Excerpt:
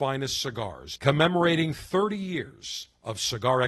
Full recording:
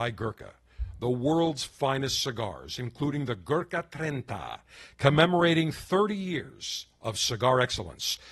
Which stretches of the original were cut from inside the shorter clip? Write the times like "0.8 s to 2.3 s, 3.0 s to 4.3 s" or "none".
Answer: 2.8 s to 4.9 s